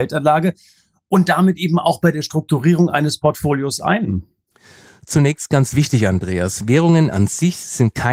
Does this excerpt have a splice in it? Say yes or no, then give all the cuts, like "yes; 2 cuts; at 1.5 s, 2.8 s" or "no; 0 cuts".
no; 0 cuts